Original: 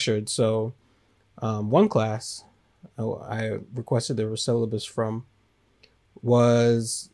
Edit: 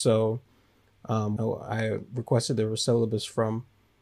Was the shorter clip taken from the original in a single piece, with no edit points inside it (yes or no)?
no